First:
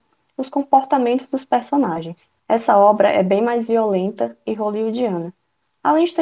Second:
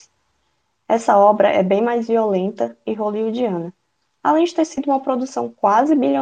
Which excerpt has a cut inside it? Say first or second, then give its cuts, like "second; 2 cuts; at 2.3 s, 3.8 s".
first; 1 cut; at 2.4 s